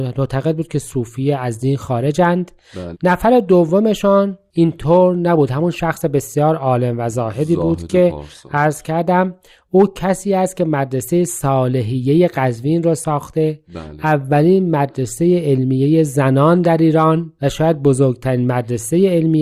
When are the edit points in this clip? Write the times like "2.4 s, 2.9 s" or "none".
2.9 s